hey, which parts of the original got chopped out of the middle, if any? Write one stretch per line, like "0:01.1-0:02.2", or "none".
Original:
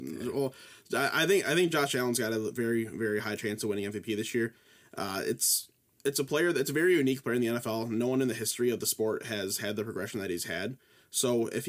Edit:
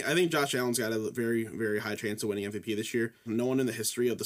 0:04.7-0:07.9